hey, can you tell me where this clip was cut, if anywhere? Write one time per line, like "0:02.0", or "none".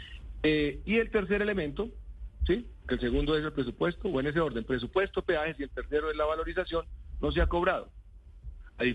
none